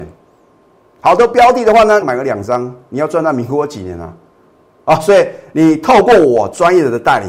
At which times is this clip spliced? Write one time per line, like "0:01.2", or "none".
0:02.0